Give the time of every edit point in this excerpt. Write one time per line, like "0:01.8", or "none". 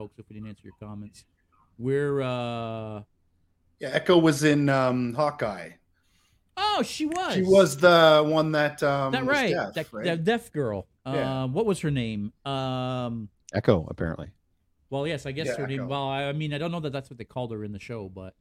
none